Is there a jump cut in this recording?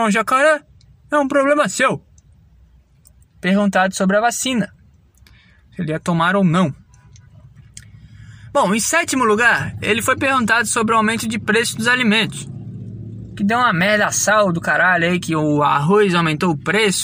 no; 0 cuts

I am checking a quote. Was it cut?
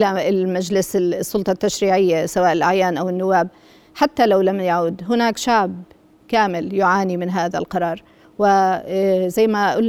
no; 0 cuts

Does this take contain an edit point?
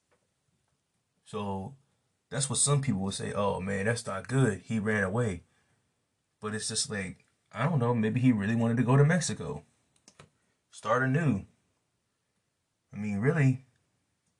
no; 0 cuts

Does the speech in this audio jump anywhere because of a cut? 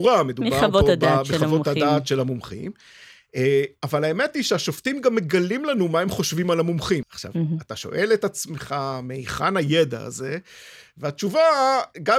yes; 1 cut; at 7.0 s

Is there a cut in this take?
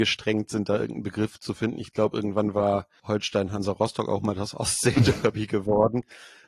no; 0 cuts

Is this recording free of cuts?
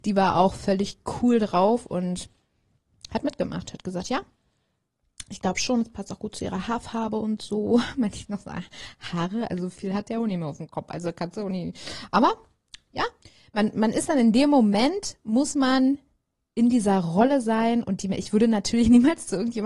yes; 0 cuts

